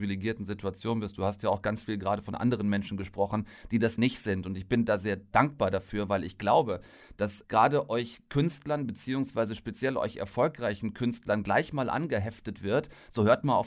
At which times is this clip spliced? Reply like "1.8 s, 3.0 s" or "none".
4.0 s, 7.4 s